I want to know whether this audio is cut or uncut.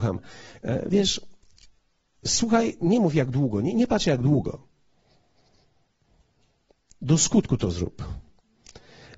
cut